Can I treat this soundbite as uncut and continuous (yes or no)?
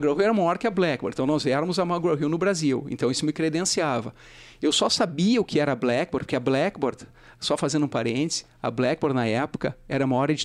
yes